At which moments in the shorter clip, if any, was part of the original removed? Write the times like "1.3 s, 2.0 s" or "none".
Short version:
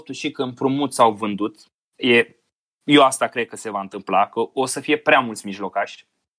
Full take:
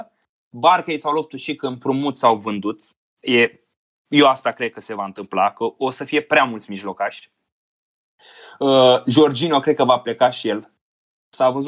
none